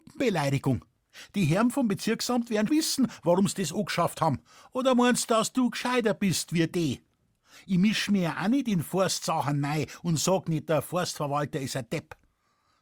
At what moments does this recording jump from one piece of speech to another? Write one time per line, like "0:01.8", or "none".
0:02.7